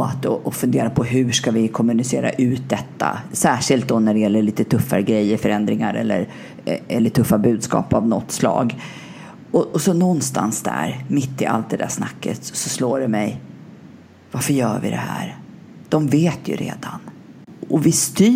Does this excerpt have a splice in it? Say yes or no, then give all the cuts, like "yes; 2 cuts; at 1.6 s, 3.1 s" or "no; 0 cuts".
no; 0 cuts